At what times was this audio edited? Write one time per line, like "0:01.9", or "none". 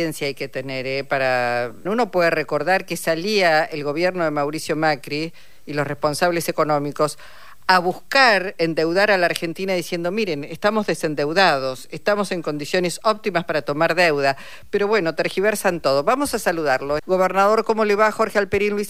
0:01.9
0:17.0